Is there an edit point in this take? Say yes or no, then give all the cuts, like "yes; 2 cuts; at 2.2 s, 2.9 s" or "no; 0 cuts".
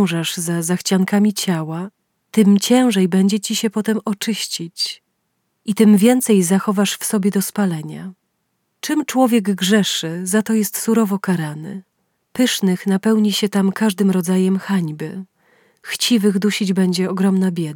yes; 1 cut; at 12.2 s